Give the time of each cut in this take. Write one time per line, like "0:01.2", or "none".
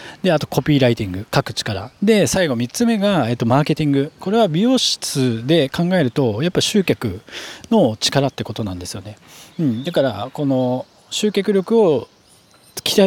none